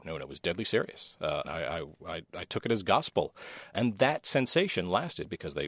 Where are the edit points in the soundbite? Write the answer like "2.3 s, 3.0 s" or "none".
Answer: 1.4 s, 3.7 s